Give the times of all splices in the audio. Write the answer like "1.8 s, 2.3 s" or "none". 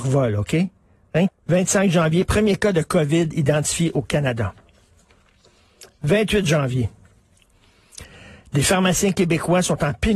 1.3 s